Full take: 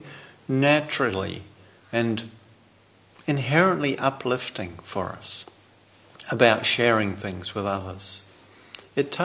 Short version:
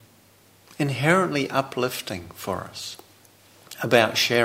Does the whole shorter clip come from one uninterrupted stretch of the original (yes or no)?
yes